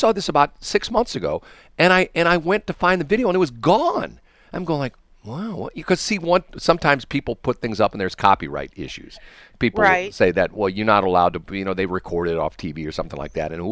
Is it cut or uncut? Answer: uncut